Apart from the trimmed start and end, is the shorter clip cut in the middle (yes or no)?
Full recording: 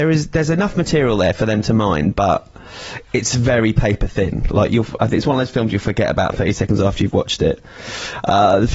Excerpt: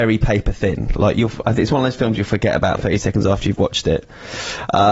no